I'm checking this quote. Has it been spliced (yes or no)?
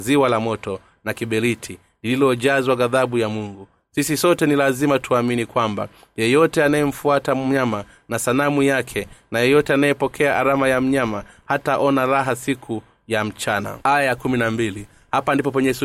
yes